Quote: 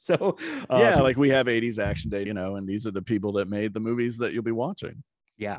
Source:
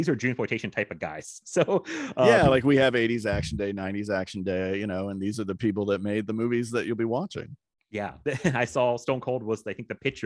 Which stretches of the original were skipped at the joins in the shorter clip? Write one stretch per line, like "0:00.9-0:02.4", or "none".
0:03.7-0:04.8